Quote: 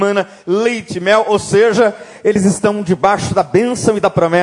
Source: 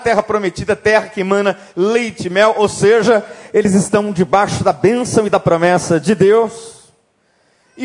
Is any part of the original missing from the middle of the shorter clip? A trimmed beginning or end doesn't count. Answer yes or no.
no